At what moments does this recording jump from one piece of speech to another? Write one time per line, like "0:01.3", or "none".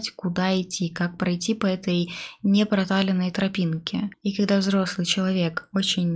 none